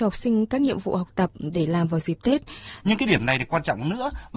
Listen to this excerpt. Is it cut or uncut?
cut